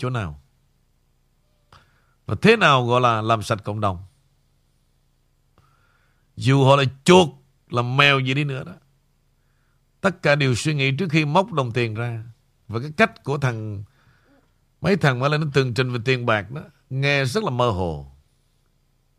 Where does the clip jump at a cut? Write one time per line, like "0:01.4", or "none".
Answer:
none